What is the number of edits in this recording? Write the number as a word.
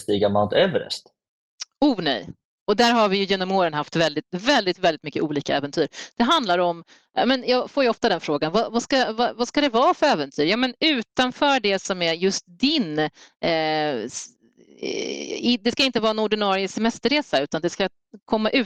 zero